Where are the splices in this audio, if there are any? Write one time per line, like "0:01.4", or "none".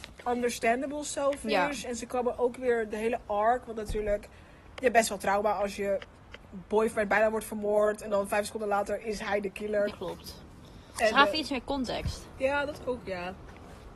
0:06.4
0:09.9